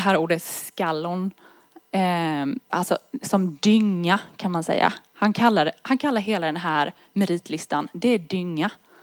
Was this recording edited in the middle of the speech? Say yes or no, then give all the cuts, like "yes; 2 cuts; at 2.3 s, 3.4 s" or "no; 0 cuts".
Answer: yes; 1 cut; at 2.7 s